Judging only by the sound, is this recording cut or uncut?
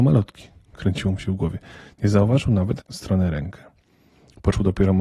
cut